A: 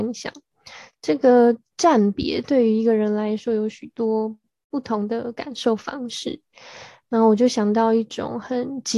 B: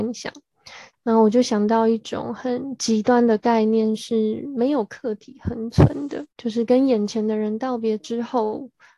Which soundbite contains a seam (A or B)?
B